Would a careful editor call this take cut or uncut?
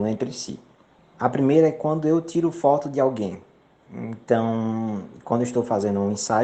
cut